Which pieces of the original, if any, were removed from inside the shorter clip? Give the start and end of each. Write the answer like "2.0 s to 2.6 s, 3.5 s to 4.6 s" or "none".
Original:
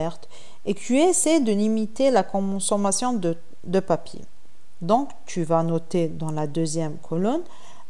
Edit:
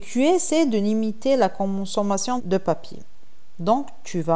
3.1 s to 3.6 s